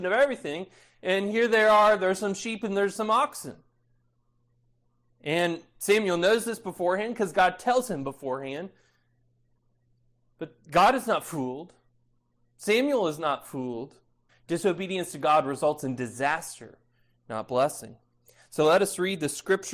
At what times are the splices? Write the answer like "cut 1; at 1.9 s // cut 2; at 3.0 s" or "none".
cut 1; at 14.3 s